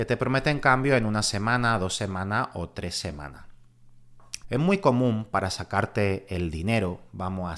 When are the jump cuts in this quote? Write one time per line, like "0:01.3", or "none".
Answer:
0:04.4